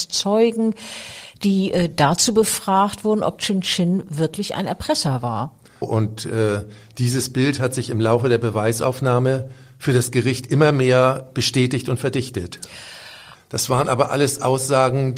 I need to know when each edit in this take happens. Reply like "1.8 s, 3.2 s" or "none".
5.8 s, 13.3 s